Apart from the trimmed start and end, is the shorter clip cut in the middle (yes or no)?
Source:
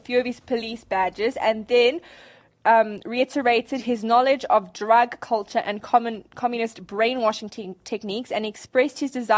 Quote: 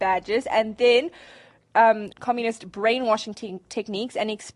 yes